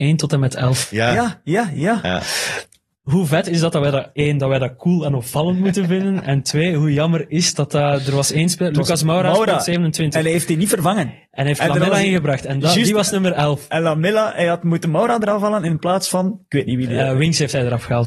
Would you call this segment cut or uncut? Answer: uncut